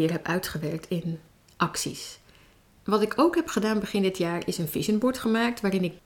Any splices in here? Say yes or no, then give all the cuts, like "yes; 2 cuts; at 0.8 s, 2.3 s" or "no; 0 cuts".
no; 0 cuts